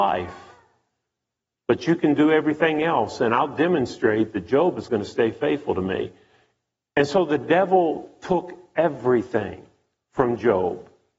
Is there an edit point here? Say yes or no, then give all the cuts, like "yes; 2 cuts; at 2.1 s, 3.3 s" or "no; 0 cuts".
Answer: no; 0 cuts